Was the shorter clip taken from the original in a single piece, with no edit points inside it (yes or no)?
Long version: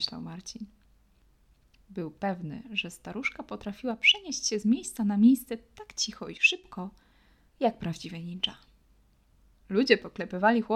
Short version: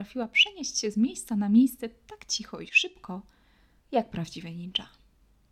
yes